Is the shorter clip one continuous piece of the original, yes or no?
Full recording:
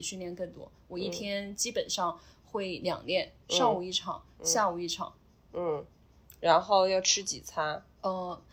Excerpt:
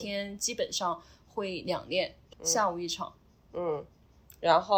no